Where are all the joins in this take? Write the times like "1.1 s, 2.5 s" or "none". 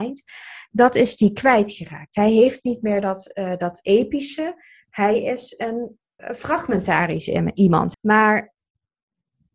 6.2 s, 7.9 s